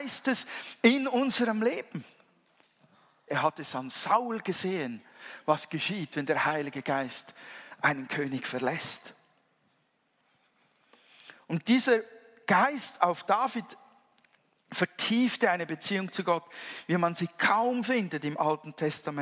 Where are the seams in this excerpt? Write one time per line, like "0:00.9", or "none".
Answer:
0:03.3